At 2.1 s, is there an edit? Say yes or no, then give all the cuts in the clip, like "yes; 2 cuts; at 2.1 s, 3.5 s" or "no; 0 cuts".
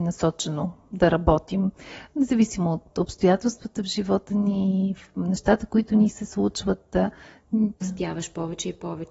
no; 1 cut; at 7.8 s